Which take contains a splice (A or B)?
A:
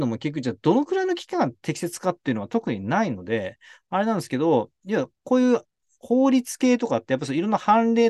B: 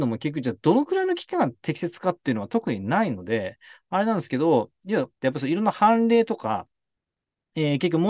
B